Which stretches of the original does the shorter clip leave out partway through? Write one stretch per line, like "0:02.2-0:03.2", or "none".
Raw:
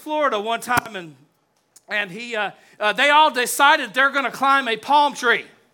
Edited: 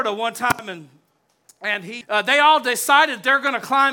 0:02.3-0:02.7